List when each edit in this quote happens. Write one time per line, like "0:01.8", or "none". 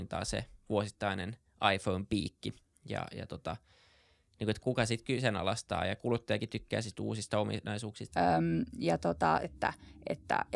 0:04.6
0:08.1
0:09.4

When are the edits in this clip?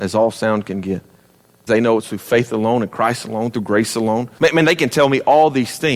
0:01.7
0:04.4

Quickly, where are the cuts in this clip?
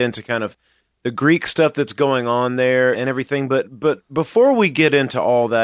0:02.9

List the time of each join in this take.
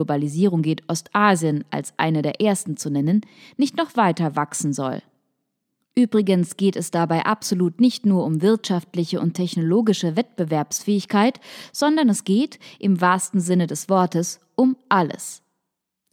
none

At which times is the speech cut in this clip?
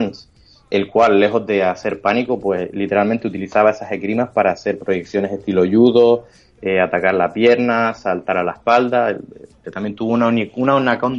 0:09.6

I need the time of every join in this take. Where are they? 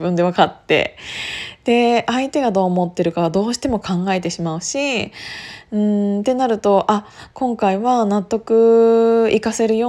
none

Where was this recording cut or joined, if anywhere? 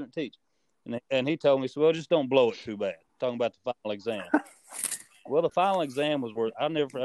none

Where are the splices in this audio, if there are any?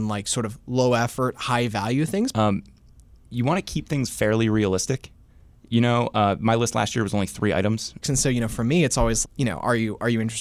0:02.3
0:08.0
0:09.2

